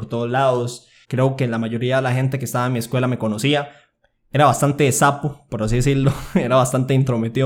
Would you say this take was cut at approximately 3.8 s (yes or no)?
no